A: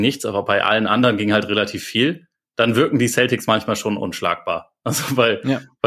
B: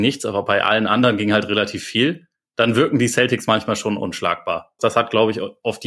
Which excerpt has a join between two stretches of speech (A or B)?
B